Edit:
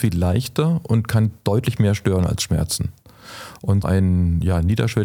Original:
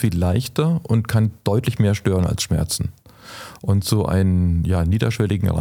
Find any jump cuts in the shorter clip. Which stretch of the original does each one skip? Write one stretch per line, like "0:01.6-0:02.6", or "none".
0:03.8-0:04.1

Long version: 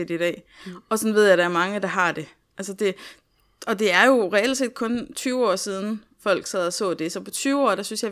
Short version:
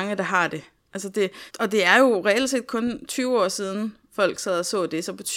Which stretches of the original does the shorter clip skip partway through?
0:03.1-0:03.6

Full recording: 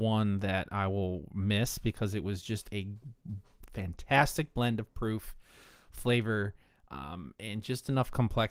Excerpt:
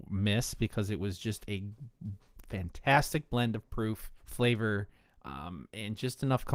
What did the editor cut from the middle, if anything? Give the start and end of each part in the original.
0:05.4-0:05.8

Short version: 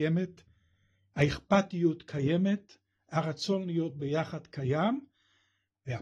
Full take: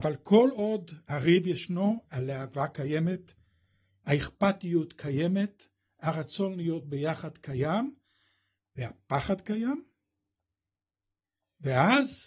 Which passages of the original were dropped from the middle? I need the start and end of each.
none

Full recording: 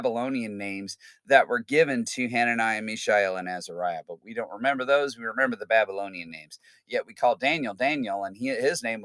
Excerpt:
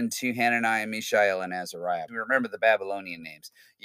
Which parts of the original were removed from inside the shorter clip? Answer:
0:04.0-0:05.2

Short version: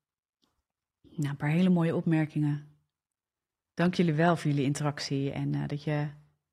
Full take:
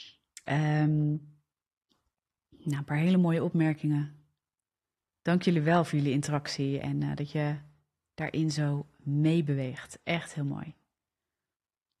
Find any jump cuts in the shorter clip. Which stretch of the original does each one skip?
none

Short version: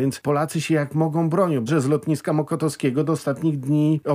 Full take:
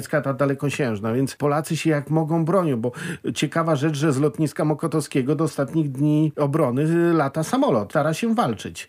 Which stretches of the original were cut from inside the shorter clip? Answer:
0:02.8-0:04.0

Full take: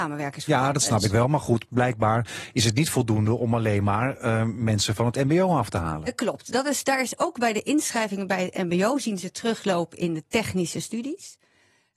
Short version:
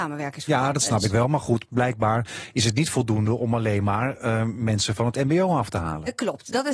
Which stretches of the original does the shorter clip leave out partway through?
none

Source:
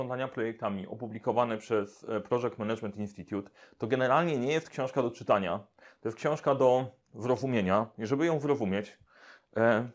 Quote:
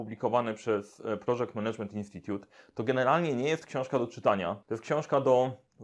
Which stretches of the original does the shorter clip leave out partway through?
0:05.7-0:06.0

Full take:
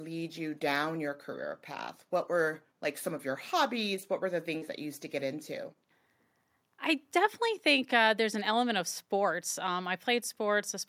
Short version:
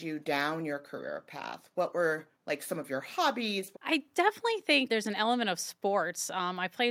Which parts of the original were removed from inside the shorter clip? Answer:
0:04.1-0:06.7
0:07.9-0:08.2

